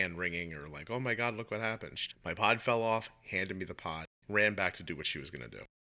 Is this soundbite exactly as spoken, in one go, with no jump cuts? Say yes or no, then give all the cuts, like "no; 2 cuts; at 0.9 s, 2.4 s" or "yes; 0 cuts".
no; 1 cut; at 2.1 s